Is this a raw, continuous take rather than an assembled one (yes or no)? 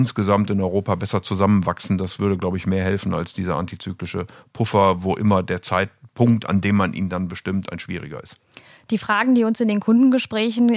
yes